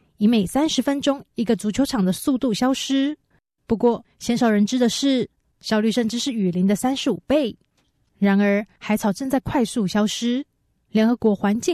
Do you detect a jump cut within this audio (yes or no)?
yes